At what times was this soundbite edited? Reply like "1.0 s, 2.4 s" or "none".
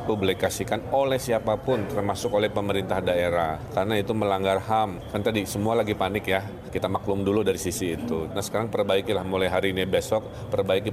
8.3 s